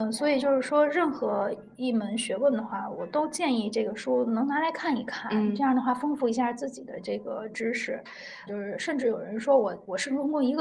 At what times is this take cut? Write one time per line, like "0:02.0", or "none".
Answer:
0:08.5